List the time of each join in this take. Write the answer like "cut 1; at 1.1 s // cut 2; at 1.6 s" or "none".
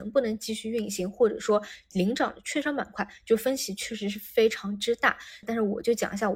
cut 1; at 5.4 s